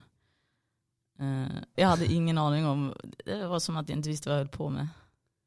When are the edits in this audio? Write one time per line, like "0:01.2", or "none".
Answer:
0:01.7